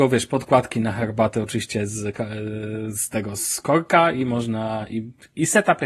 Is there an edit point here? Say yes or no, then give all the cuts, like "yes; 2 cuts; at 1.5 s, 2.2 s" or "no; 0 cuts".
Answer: no; 0 cuts